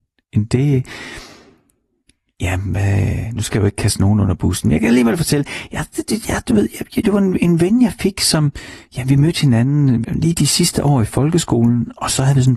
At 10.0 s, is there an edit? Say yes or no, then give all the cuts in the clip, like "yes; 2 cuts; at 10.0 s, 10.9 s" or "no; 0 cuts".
yes; 2 cuts; at 7.0 s, 10.0 s